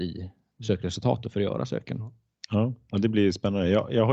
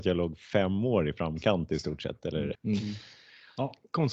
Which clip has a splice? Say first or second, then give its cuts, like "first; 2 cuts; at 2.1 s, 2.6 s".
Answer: second; 1 cut; at 2.5 s